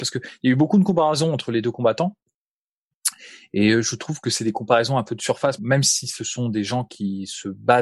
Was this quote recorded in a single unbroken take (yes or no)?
no